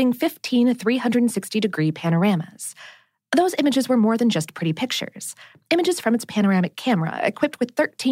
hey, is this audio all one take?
yes; 0 cuts

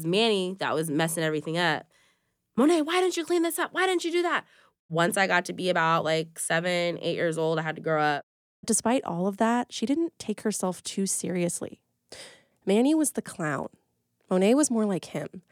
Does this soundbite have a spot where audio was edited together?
yes; 1 cut; at 12.5 s

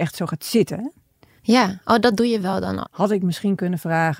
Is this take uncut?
no; 1 cut; at 2.8 s

